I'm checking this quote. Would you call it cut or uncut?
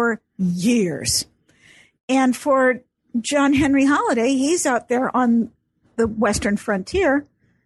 uncut